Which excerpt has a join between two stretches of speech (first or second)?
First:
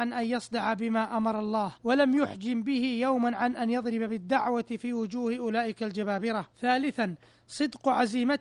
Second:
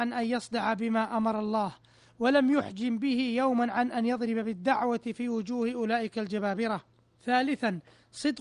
first